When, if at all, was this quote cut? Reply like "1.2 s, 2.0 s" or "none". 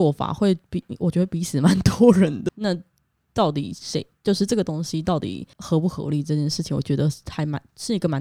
2.5 s, 5.5 s